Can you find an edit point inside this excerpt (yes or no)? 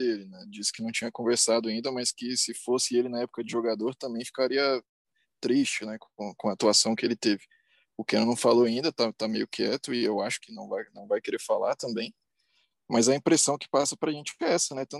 no